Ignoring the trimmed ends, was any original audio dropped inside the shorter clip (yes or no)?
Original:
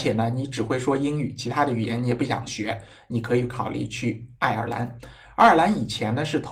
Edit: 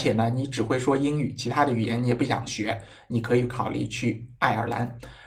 no